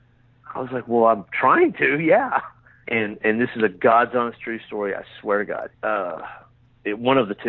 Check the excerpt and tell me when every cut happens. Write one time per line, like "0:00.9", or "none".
0:02.8
0:05.7